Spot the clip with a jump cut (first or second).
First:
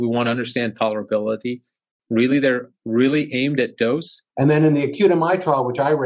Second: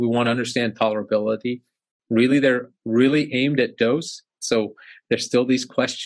first